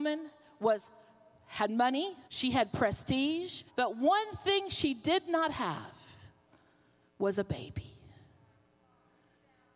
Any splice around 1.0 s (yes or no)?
no